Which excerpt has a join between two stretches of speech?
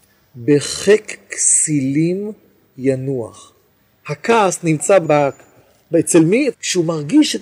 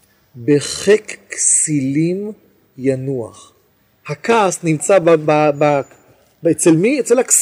first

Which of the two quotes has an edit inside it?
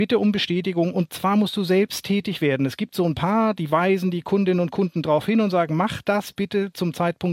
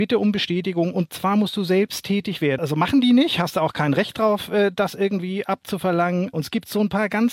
second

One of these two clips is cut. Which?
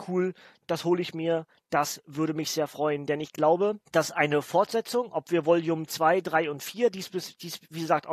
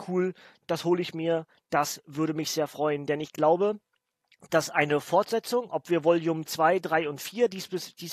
first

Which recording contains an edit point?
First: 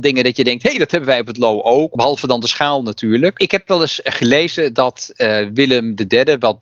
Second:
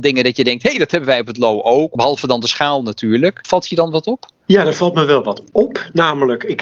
first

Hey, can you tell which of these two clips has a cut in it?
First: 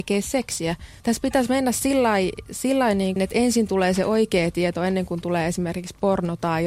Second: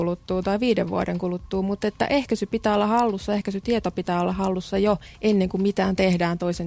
first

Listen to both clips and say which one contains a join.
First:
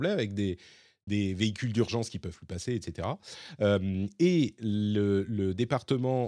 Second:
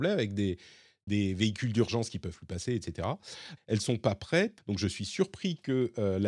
second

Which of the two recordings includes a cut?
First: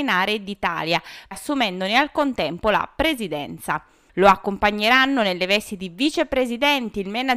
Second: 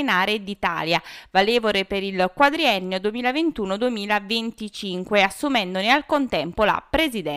first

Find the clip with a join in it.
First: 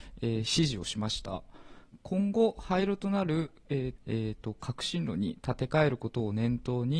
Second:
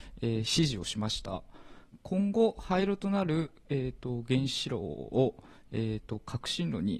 first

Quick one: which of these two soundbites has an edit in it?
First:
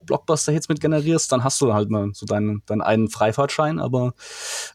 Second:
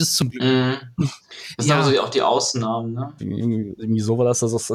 second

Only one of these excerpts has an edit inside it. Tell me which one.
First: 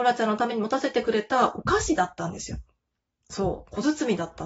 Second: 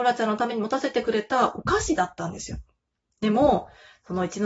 second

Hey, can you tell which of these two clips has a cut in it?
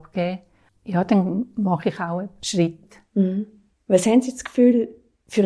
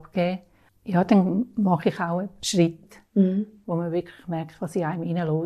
second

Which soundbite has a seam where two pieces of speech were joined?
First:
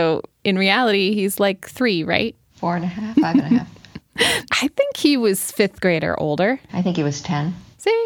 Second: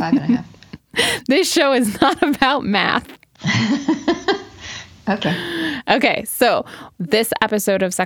first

